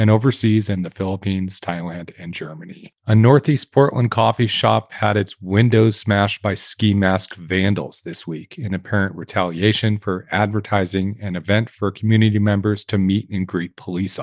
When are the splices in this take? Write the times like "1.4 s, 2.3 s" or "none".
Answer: 3.0 s